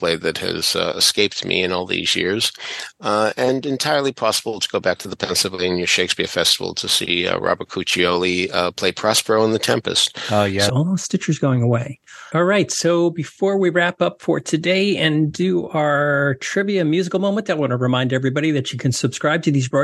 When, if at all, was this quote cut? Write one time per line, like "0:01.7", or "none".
0:10.7
0:12.3